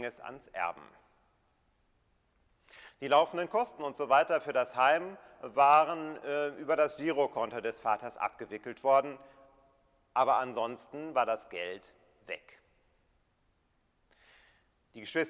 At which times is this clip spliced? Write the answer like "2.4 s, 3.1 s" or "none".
none